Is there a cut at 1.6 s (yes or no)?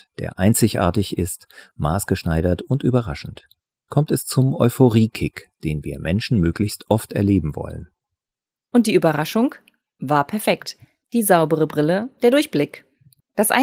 no